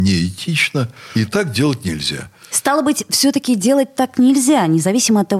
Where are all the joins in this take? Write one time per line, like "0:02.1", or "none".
none